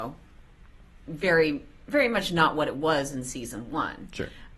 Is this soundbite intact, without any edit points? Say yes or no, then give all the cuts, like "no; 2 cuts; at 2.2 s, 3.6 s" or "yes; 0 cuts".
yes; 0 cuts